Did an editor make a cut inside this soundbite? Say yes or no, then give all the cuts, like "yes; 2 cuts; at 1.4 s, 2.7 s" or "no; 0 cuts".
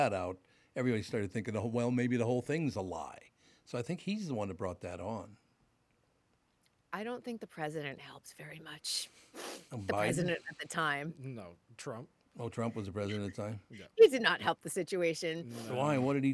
no; 0 cuts